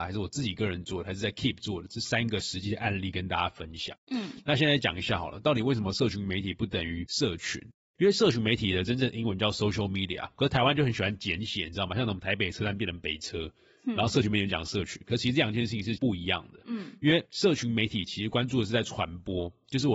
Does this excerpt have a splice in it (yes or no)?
no